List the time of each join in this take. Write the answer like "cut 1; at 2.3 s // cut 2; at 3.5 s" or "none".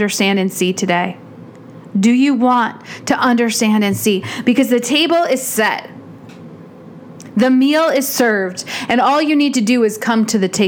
none